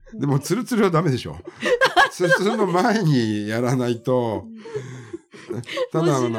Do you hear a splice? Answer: no; 0 cuts

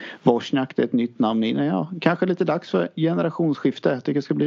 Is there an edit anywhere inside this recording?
no; 0 cuts

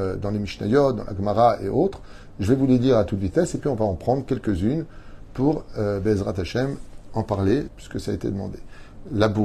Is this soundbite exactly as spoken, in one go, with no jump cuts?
no; 1 cut; at 7.7 s

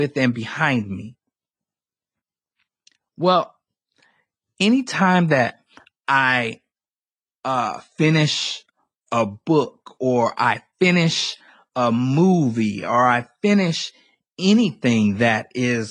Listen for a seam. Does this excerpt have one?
no; 0 cuts

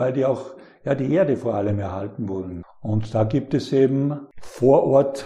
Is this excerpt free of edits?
no; 1 cut; at 2.6 s

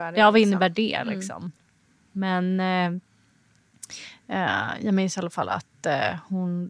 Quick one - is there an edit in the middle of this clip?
no; 0 cuts

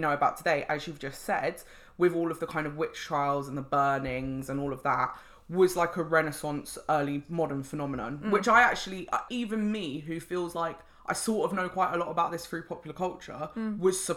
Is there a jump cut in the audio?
yes; 1 cut; at 9.3 s

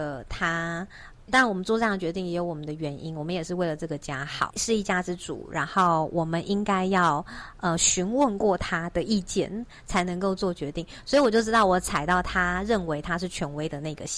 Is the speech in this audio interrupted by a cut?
yes; 2 cuts; at 1.3 s, 4.5 s

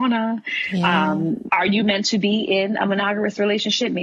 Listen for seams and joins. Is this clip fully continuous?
no; 1 cut; at 1.5 s

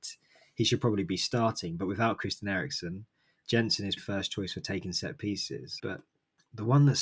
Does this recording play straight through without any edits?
no; 2 cuts; at 4.0 s, 5.8 s

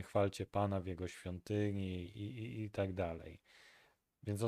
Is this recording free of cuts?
yes; 0 cuts

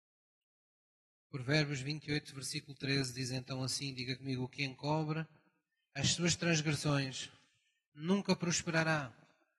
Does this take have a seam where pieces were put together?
no; 0 cuts

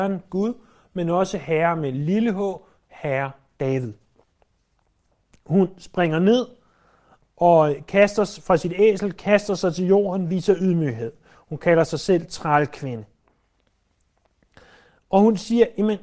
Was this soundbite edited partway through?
no; 0 cuts

